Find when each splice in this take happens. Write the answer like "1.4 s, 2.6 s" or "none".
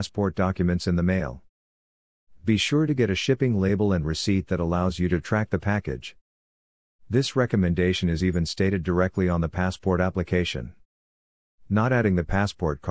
none